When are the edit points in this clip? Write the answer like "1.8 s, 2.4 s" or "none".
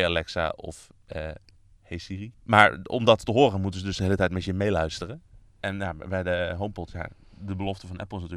2.3 s